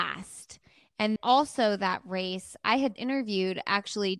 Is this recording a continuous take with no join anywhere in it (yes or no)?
no